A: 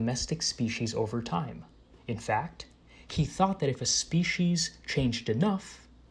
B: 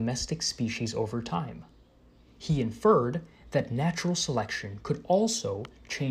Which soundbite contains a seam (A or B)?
A